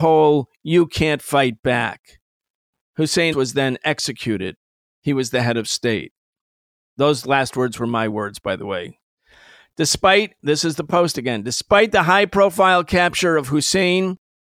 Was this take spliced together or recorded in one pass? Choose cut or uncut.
cut